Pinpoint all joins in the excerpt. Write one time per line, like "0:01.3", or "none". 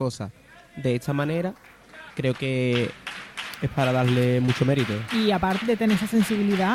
0:02.1
0:05.6